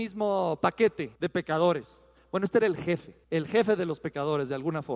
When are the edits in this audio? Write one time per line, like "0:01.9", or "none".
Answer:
0:01.2
0:03.2